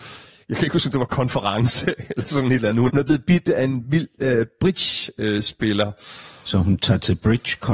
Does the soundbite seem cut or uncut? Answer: cut